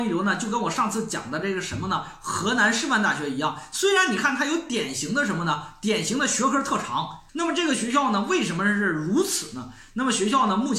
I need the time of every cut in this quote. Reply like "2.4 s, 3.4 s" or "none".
7.3 s